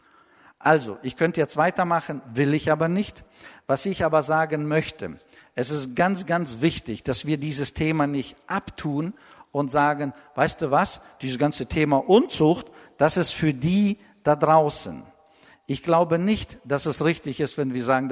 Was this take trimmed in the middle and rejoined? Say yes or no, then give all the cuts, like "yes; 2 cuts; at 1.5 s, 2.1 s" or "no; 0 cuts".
no; 0 cuts